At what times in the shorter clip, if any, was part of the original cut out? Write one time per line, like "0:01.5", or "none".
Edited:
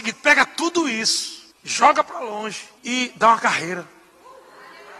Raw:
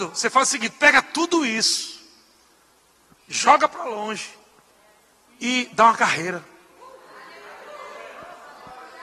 0:01.5
0:02.8

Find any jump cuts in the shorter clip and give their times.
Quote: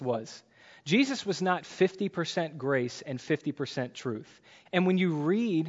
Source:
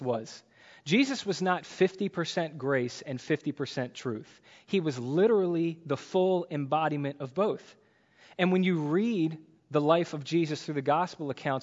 0:04.6

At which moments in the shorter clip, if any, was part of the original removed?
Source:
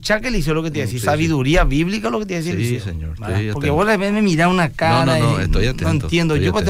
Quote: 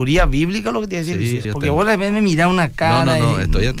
0:01.4

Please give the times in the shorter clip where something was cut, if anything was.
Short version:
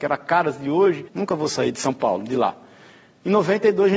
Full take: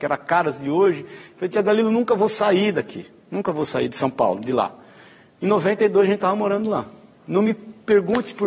0:01.1

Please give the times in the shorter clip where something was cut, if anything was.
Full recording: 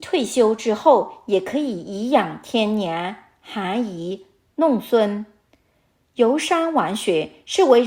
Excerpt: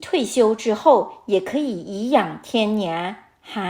none

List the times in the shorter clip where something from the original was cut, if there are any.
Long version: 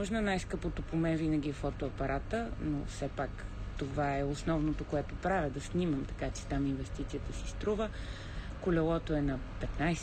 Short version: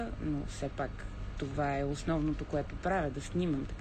none

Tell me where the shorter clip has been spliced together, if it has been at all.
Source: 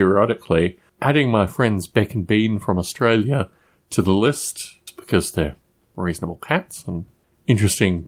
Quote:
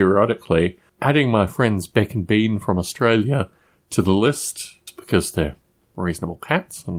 none

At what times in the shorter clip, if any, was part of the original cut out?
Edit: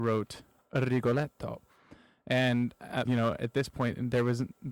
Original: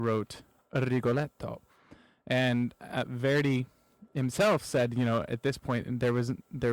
0:03.1

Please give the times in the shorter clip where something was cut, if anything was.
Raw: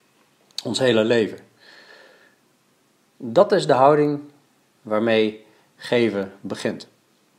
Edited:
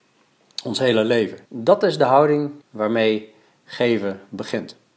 0:01.5
0:02.6

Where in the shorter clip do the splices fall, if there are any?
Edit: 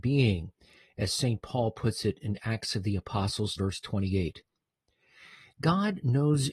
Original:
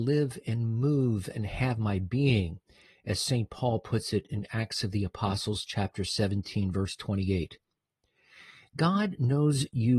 0:03.6

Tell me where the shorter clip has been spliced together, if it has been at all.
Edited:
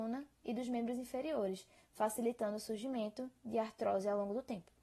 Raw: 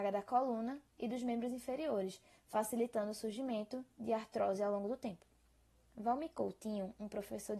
none

